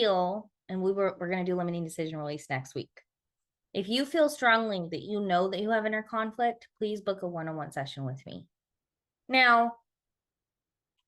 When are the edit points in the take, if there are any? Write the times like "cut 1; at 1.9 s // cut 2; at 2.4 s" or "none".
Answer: cut 1; at 9.2 s